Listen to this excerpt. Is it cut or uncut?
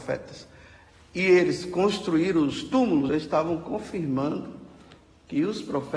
cut